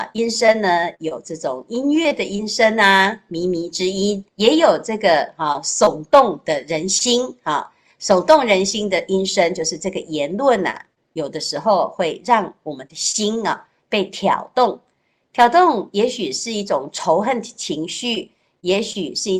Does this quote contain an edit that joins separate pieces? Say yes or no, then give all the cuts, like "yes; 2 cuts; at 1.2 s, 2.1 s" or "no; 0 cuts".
yes; 1 cut; at 4.3 s